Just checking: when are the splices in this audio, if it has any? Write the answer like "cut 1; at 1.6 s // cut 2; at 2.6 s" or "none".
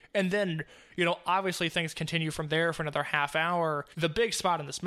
cut 1; at 3.9 s